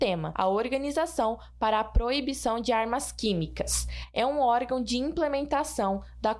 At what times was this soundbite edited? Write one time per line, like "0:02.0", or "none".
none